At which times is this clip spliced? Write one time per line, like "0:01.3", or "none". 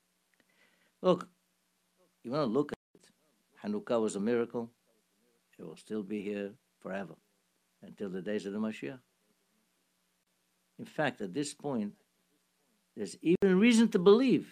0:05.4